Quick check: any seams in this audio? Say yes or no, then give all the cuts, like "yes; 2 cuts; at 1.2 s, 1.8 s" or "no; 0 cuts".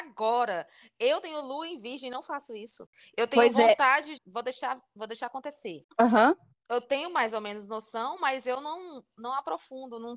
yes; 1 cut; at 4.2 s